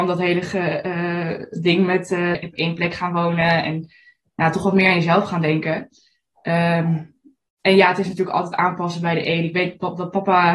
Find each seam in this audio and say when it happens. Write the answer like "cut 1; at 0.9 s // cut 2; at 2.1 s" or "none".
cut 1; at 2.3 s